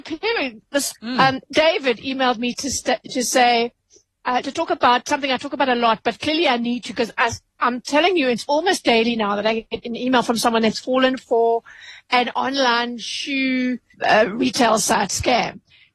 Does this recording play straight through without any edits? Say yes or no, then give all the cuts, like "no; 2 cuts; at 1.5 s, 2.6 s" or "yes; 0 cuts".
no; 2 cuts; at 0.9 s, 13.9 s